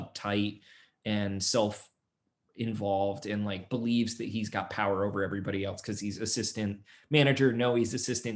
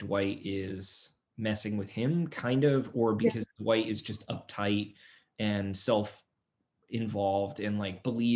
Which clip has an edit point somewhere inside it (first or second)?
second